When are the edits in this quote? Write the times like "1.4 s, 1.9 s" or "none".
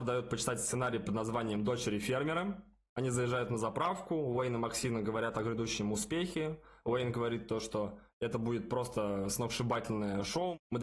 none